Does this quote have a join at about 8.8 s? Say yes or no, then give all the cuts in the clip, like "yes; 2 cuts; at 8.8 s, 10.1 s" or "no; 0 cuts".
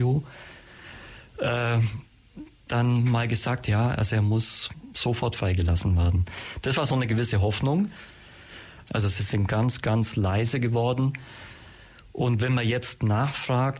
yes; 1 cut; at 8.8 s